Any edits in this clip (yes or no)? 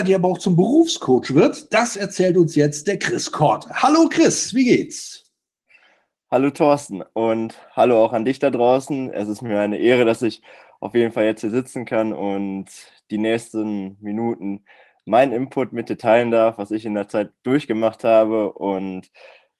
no